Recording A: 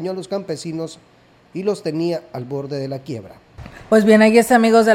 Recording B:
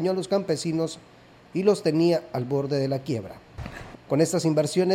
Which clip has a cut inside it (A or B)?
B